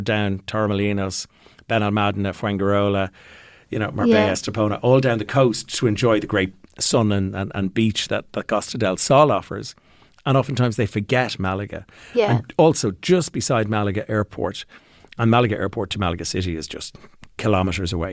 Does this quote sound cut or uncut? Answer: uncut